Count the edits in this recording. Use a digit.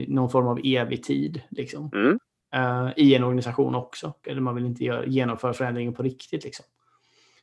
1